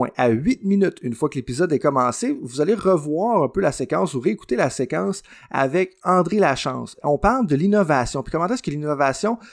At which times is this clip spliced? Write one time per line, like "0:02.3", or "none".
none